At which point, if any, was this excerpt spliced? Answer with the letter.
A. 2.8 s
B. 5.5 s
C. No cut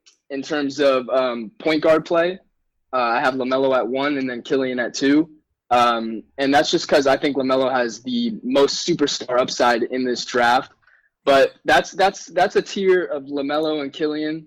C